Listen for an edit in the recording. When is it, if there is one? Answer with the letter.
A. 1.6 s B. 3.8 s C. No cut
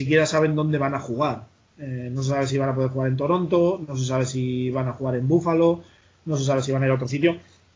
C